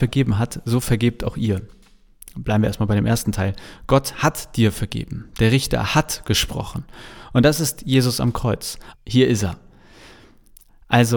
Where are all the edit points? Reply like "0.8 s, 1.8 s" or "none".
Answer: 8.9 s

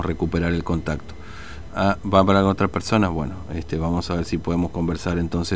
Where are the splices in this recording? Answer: 1.7 s

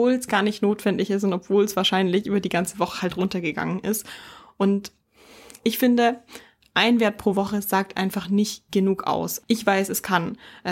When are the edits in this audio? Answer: 9.4 s

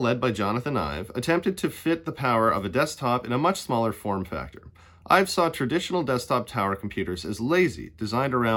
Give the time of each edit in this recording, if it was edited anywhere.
none

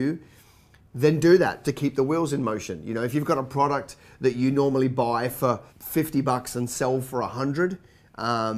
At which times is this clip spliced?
1.6 s, 5.7 s

